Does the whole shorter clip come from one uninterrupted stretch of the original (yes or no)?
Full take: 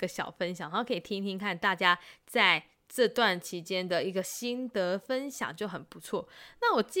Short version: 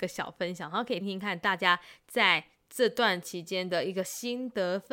no